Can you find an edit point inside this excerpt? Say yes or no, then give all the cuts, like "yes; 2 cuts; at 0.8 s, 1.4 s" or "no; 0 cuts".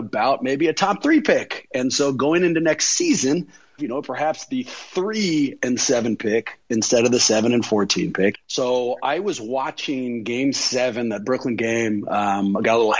yes; 2 cuts; at 3.8 s, 8.3 s